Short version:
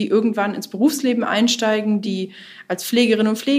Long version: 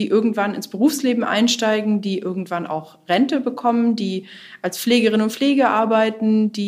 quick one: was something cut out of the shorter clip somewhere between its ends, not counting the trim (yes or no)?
yes